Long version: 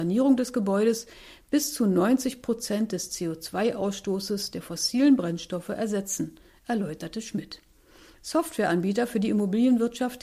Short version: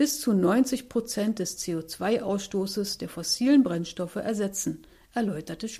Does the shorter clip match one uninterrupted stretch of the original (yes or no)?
yes